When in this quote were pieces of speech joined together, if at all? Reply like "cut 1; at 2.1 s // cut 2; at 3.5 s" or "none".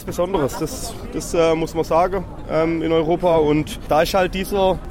none

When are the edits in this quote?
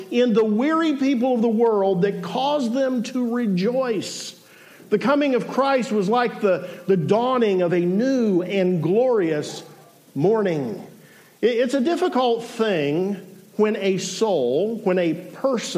none

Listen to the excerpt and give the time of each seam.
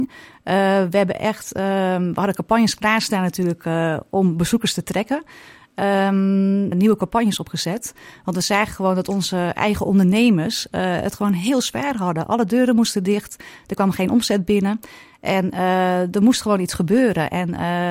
cut 1; at 6.7 s

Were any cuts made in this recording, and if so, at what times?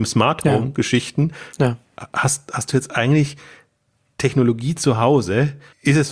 none

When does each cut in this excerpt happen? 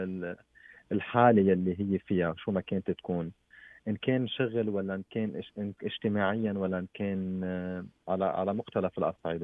none

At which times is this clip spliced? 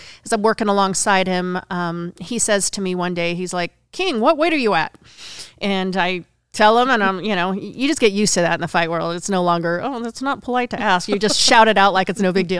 none

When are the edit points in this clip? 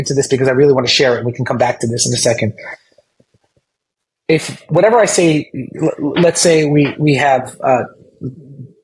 none

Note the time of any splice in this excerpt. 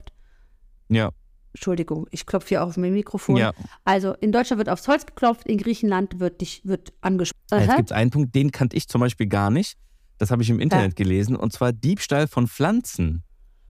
cut 1; at 7.3 s

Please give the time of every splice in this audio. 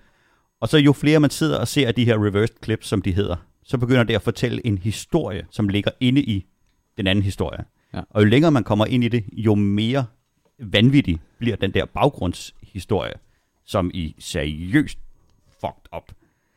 cut 1; at 5.5 s

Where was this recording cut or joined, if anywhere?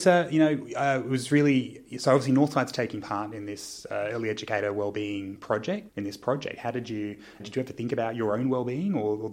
cut 1; at 5.9 s // cut 2; at 7.4 s

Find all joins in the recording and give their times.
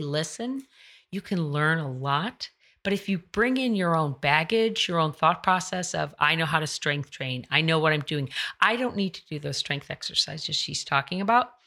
none

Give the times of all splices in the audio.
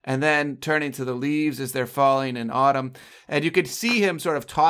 none

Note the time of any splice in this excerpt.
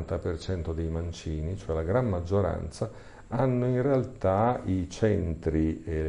none

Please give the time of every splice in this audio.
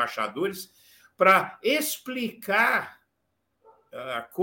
none

